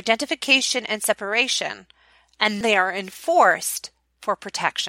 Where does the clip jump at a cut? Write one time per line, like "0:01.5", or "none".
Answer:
0:02.6